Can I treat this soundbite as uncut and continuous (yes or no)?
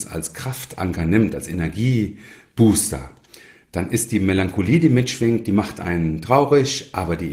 yes